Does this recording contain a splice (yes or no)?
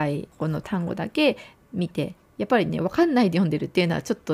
no